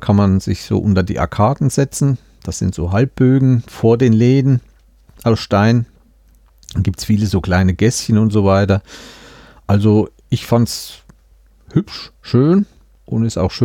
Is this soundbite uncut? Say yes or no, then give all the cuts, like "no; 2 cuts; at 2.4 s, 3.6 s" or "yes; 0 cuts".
yes; 0 cuts